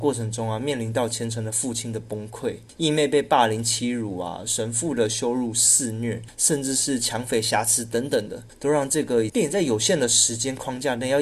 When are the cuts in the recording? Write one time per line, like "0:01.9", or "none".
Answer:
0:09.3

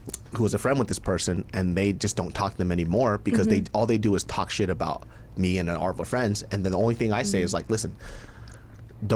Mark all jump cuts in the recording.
none

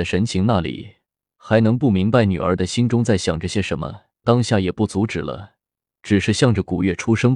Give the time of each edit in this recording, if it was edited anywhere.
0:04.2

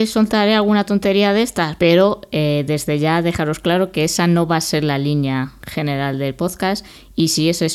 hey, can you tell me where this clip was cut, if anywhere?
0:01.8

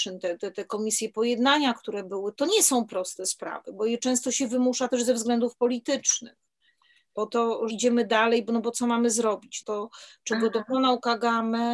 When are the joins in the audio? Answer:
0:02.3
0:07.7
0:09.6

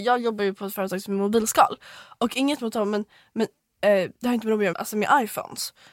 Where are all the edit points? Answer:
0:04.7

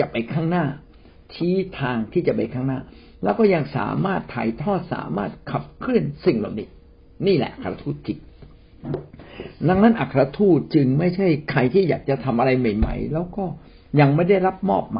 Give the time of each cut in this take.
none

